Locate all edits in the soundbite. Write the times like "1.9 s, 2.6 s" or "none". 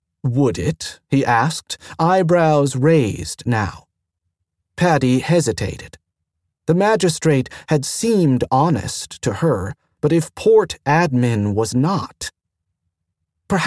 none